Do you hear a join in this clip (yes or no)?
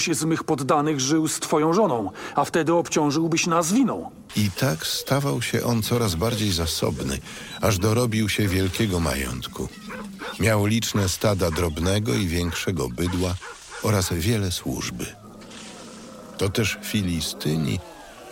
yes